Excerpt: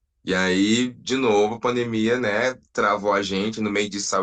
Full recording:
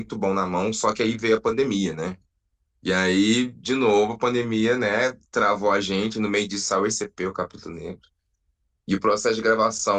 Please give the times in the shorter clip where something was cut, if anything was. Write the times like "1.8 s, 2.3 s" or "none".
none